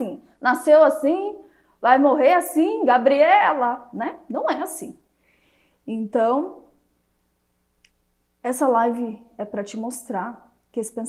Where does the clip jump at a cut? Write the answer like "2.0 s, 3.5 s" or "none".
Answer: none